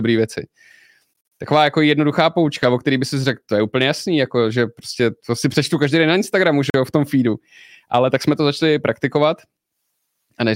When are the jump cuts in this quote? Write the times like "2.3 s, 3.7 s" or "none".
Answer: none